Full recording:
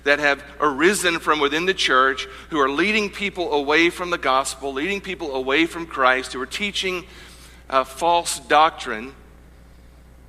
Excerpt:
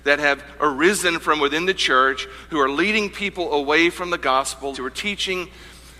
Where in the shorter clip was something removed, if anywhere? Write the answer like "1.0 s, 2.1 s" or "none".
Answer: 4.7 s